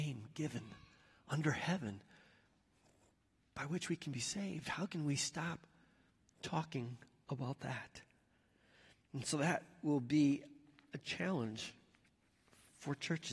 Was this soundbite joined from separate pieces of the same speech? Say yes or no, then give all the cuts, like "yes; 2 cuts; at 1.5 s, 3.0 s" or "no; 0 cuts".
no; 0 cuts